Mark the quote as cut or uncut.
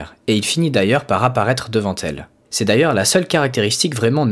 cut